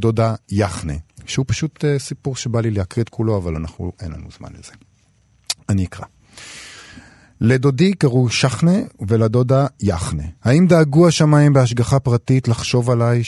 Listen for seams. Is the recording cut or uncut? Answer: cut